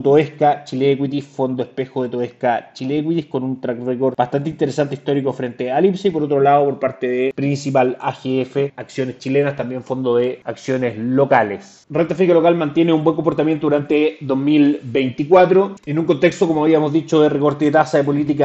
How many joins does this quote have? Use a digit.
2